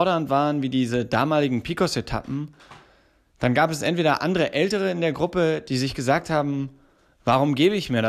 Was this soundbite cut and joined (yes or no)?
no